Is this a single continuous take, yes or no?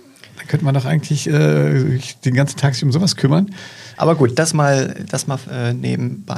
no